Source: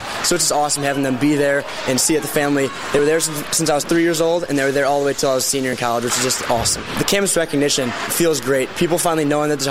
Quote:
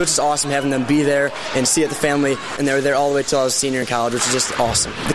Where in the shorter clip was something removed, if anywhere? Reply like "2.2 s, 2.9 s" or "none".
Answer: 2.6 s

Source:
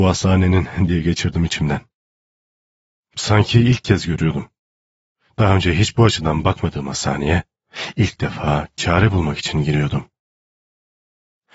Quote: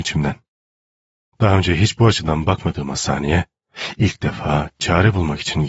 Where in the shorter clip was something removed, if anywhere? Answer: 1.3 s

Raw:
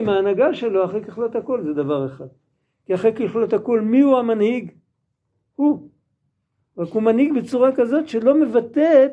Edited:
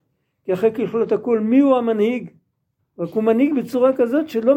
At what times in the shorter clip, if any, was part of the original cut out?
2.8 s

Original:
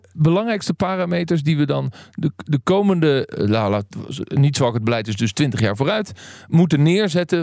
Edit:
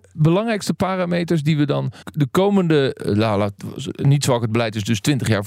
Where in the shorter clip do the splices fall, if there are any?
2.0 s

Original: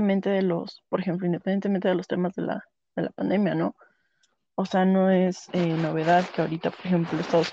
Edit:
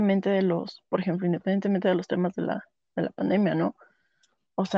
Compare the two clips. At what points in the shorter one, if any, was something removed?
none

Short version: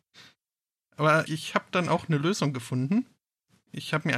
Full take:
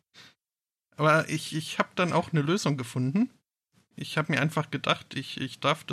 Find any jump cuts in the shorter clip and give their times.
1.3 s

